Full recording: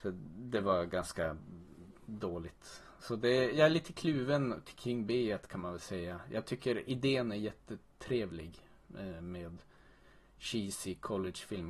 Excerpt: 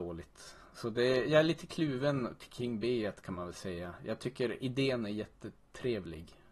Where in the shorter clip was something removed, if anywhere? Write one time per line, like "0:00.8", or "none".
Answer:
none

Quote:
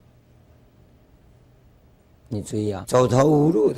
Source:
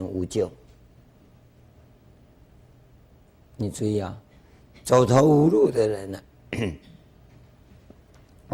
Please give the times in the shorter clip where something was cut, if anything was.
0:02.8

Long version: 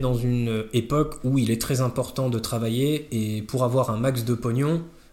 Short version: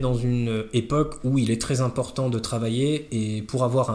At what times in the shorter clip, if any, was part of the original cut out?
none

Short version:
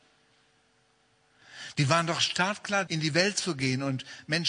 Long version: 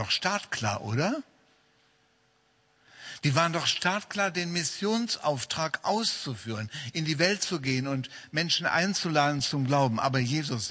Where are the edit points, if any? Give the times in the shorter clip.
0:02.9

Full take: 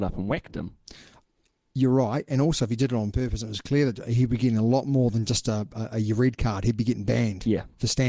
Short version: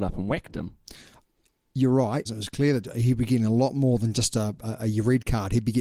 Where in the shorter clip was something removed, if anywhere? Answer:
0:02.3

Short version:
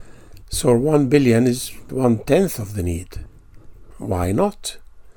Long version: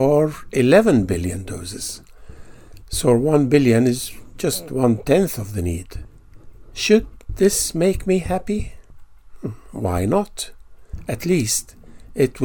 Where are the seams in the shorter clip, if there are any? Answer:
0:01.9
0:03.9

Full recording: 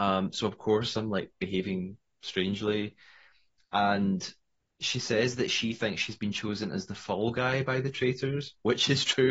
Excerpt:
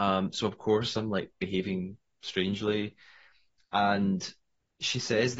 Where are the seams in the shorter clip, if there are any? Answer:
none

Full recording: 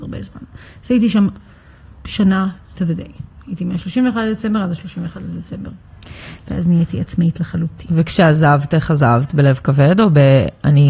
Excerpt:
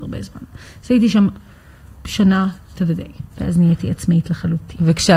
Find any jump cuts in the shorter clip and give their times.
0:03.3

